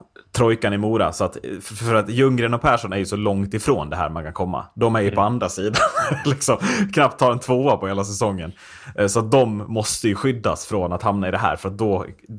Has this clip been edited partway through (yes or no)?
no